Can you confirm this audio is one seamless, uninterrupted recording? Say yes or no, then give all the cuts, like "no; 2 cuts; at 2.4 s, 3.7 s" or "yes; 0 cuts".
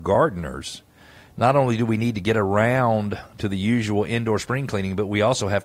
yes; 0 cuts